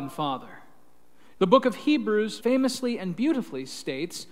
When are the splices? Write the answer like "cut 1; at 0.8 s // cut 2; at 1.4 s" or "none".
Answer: cut 1; at 1.4 s // cut 2; at 2.4 s